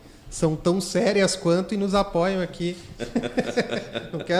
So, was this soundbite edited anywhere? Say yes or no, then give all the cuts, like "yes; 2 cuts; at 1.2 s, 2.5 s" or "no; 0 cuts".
yes; 1 cut; at 3.0 s